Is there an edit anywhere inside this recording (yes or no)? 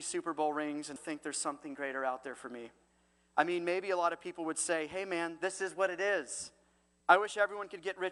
yes